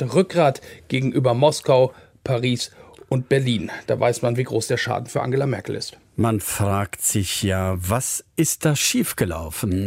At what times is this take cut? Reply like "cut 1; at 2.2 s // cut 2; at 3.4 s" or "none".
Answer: none